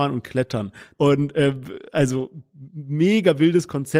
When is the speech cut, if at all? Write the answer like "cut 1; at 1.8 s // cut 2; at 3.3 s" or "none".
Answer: cut 1; at 0.9 s

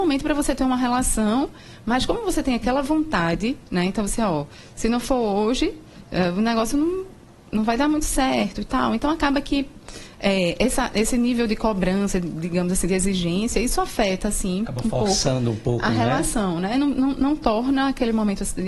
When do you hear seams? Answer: none

